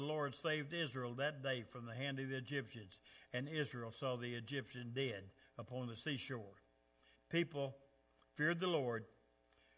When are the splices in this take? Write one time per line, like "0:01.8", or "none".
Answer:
0:07.1